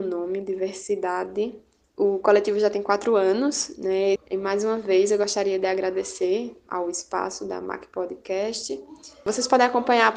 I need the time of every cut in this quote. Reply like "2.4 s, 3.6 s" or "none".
4.2 s, 6.7 s